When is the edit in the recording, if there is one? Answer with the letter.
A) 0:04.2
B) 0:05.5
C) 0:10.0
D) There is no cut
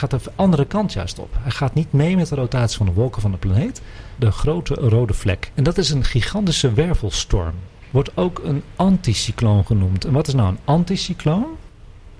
A